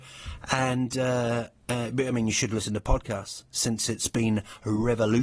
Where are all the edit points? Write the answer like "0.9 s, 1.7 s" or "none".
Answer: none